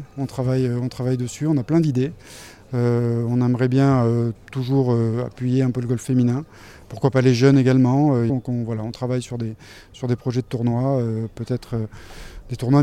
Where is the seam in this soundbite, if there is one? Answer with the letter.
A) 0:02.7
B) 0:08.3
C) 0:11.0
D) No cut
B